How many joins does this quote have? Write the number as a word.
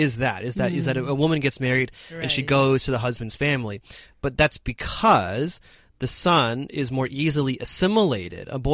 zero